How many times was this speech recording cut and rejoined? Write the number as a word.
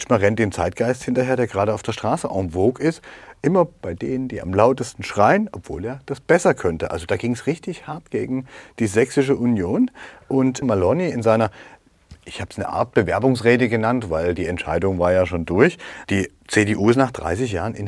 two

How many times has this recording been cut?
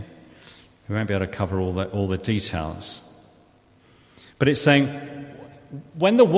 zero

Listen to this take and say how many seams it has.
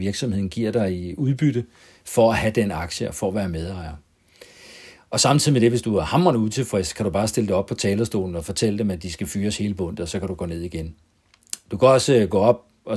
zero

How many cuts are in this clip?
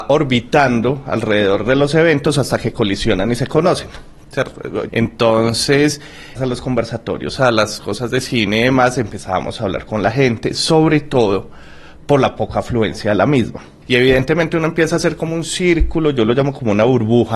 three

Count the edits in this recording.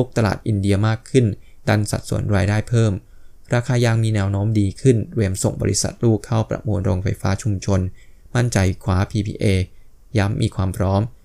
zero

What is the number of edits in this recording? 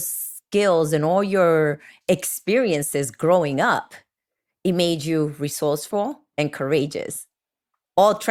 one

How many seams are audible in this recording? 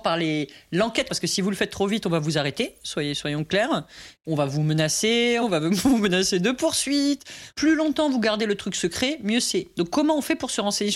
two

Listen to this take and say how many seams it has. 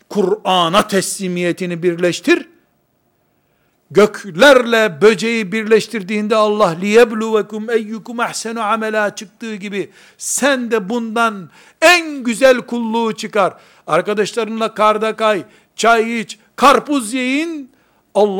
zero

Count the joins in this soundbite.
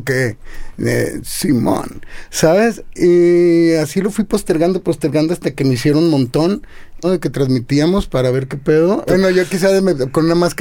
two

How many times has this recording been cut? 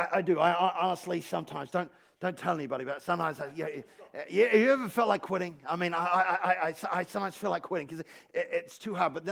zero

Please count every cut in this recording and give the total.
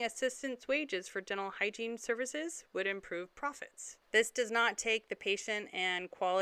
one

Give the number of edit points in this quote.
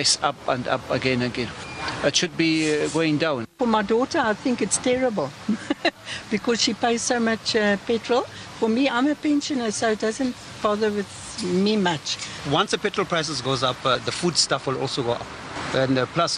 zero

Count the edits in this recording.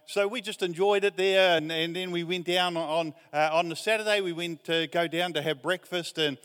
zero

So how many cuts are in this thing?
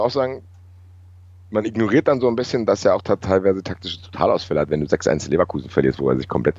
zero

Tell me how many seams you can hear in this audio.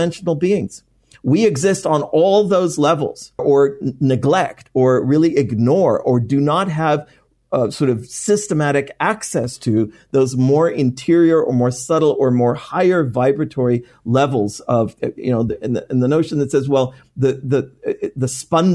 one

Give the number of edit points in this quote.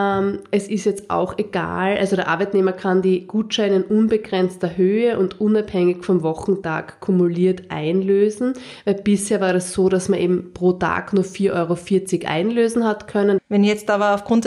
one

